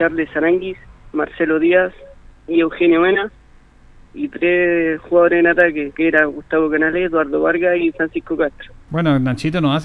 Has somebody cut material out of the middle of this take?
yes; 1 cut; at 8.9 s

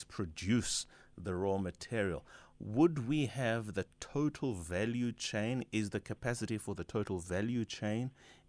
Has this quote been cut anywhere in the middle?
no; 0 cuts

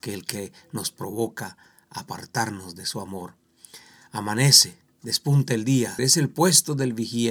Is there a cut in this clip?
yes; 1 cut; at 6.0 s

